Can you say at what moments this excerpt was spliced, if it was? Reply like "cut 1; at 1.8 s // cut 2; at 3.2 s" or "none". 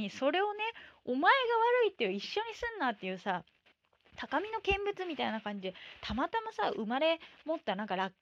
none